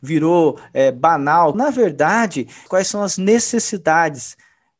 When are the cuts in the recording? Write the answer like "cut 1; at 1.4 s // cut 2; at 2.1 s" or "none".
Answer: cut 1; at 1.5 s // cut 2; at 2.7 s